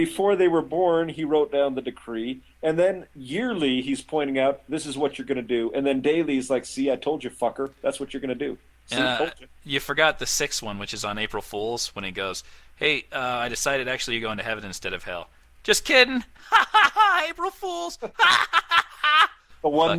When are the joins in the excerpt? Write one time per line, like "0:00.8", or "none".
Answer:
none